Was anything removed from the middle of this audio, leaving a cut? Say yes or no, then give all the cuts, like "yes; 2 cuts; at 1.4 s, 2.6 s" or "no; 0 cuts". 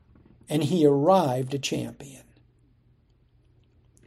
no; 0 cuts